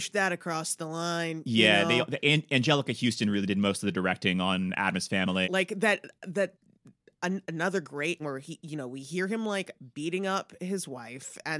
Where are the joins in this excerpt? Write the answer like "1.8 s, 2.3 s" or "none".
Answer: 5.4 s, 8.2 s